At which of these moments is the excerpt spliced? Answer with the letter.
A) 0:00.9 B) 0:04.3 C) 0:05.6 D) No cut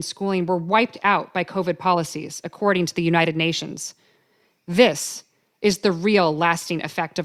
D